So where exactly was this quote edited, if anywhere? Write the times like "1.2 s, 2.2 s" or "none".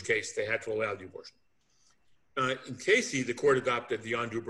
none